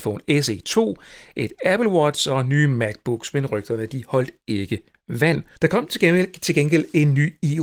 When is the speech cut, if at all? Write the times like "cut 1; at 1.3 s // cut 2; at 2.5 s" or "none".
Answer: cut 1; at 5.5 s